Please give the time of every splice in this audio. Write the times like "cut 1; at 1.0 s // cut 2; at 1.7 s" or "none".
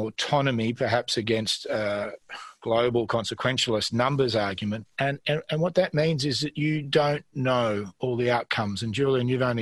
cut 1; at 4.8 s